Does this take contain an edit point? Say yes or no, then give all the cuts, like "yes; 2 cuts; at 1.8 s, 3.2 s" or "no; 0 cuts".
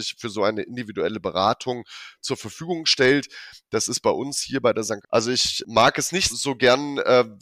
yes; 2 cuts; at 5.0 s, 6.3 s